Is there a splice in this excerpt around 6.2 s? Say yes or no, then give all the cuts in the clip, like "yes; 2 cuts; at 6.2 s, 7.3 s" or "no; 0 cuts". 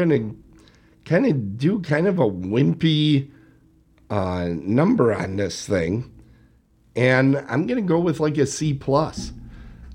no; 0 cuts